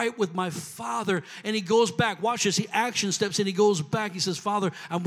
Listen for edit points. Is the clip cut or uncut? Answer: uncut